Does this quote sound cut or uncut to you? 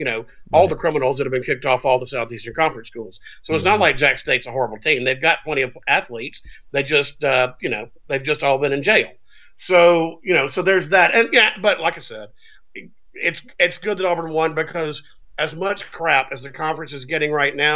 uncut